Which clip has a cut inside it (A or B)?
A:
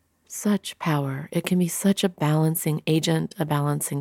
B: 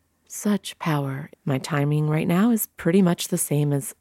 B